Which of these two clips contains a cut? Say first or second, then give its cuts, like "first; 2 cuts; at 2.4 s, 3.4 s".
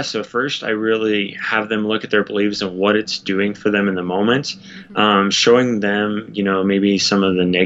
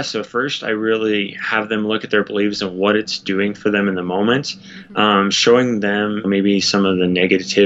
second; 1 cut; at 6.2 s